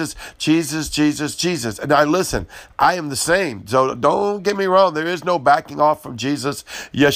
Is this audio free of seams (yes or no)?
yes